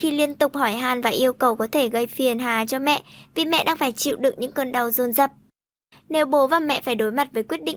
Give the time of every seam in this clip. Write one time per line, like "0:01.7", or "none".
0:05.9